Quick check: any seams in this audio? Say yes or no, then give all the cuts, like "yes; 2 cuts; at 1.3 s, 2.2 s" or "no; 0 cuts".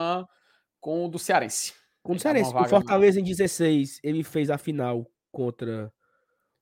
no; 0 cuts